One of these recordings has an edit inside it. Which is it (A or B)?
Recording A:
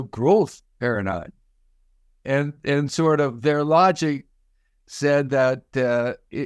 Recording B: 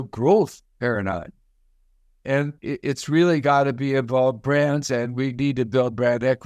B